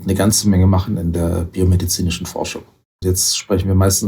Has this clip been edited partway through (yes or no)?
yes